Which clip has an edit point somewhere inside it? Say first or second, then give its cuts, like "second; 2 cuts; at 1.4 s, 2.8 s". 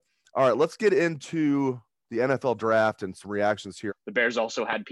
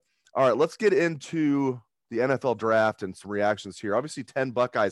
first; 1 cut; at 3.9 s